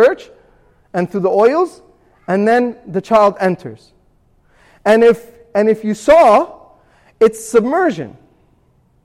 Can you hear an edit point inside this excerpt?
no; 0 cuts

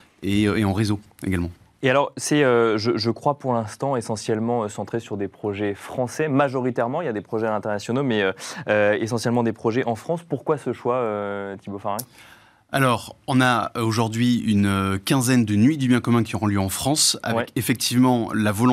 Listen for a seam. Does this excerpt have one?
no; 0 cuts

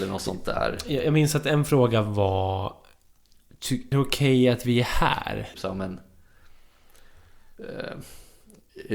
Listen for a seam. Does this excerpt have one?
yes; 2 cuts; at 3.9 s, 5.5 s

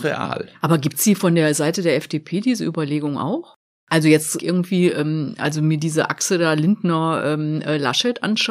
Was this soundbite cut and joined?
yes; 1 cut; at 4.4 s

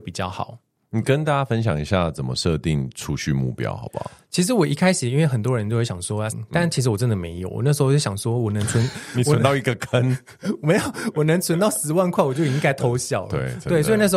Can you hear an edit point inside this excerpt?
yes; 1 cut; at 6.3 s

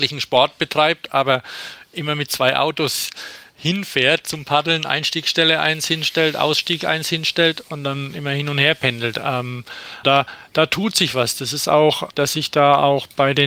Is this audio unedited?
no; 2 cuts; at 10.0 s, 12.1 s

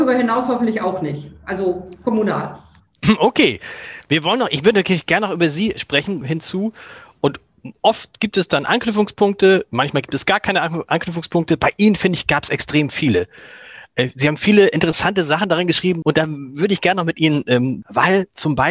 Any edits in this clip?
yes; 3 cuts; at 6.2 s, 16.0 s, 17.8 s

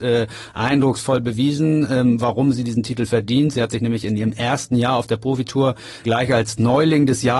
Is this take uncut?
no; 1 cut; at 6.0 s

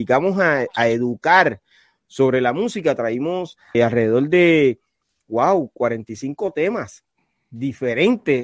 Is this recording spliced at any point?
yes; 1 cut; at 3.7 s

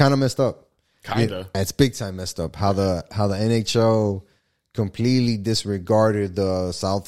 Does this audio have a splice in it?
yes; 1 cut; at 1.5 s

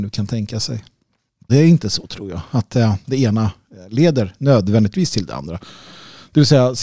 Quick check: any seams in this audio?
yes; 1 cut; at 1.5 s

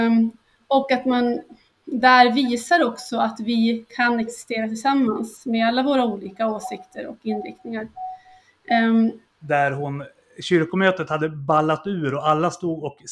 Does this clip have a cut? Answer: yes; 1 cut; at 9.4 s

